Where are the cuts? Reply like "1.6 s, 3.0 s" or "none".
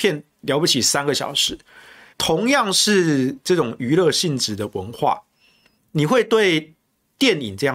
2.1 s